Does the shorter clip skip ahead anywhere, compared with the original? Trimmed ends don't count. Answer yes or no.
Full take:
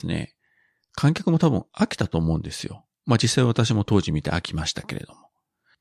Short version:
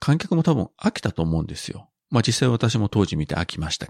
no